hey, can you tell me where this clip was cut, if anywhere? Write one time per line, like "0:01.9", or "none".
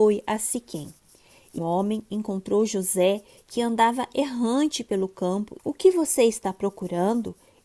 0:01.6
0:05.6